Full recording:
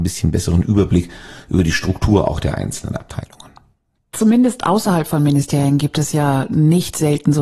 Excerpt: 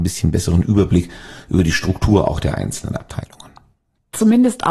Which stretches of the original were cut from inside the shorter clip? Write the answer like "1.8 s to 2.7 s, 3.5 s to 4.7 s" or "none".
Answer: none